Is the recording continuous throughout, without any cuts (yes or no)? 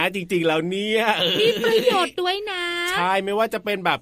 yes